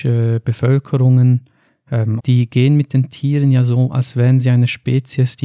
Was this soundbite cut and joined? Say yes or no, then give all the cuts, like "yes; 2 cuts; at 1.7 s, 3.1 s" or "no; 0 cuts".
yes; 2 cuts; at 2.2 s, 3.9 s